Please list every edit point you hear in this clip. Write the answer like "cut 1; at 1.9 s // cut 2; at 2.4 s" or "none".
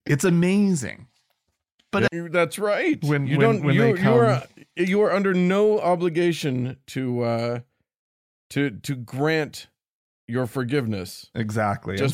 cut 1; at 2.1 s

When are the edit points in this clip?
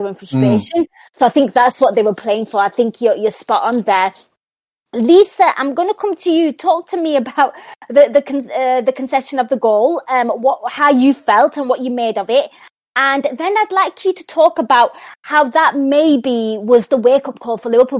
none

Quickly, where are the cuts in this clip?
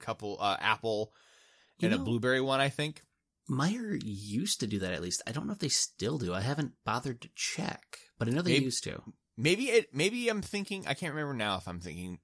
none

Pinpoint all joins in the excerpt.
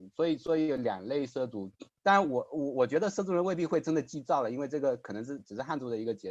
cut 1; at 2.0 s

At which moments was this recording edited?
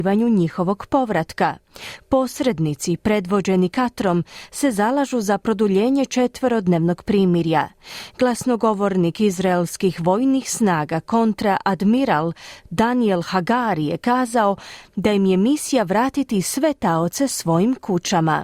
none

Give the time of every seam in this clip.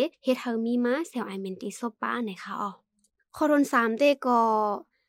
none

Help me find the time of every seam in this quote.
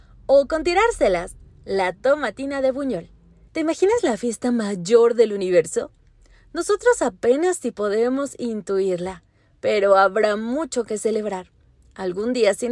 cut 1; at 3.5 s

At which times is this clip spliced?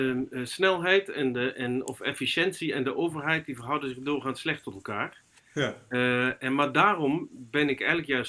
none

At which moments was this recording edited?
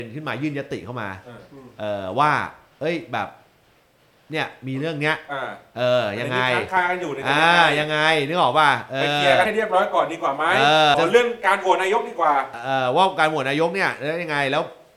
cut 1; at 10.9 s

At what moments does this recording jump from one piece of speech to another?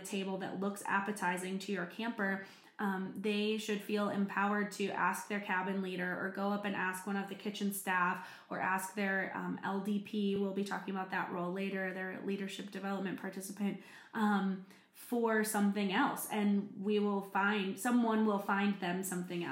none

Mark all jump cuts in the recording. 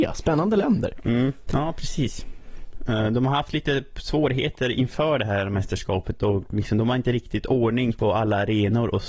cut 1; at 1.4 s

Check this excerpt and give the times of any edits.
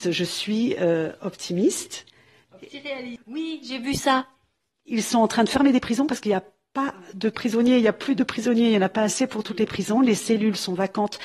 cut 1; at 3.2 s

